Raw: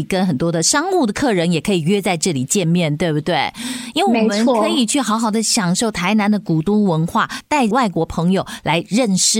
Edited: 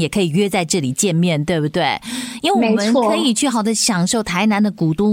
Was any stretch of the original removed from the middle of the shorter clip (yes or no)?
yes